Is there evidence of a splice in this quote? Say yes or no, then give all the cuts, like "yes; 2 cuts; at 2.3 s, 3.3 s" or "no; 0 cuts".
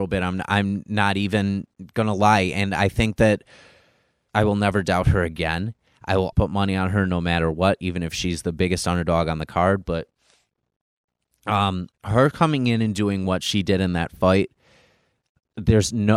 yes; 3 cuts; at 4.3 s, 6.3 s, 11.9 s